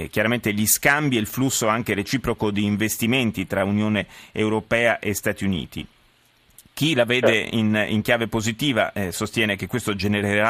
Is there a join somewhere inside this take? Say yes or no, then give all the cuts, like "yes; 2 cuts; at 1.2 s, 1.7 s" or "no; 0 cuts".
no; 0 cuts